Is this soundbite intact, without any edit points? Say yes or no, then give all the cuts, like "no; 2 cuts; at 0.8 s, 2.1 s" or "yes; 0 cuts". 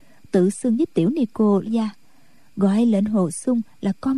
no; 1 cut; at 1.7 s